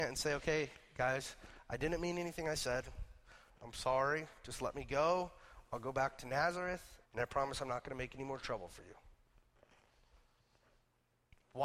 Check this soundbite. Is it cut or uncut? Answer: cut